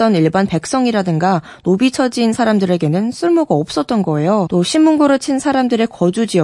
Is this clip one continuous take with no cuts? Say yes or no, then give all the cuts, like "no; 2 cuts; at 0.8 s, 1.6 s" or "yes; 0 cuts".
no; 1 cut; at 4.5 s